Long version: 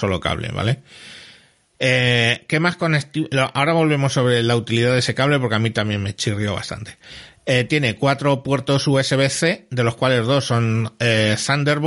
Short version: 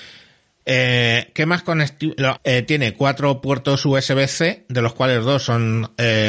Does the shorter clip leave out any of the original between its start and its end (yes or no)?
yes